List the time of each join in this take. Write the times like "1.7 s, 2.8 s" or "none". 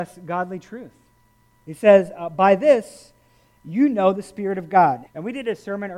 1.6 s, 5.1 s